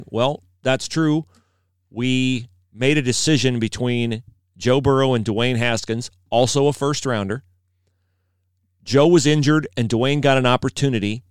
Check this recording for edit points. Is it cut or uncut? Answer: uncut